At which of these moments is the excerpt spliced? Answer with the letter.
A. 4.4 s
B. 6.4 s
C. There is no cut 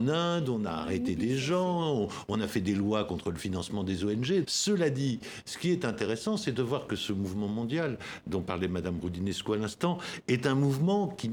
A